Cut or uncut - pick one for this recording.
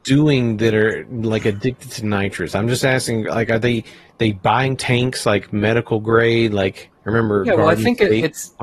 uncut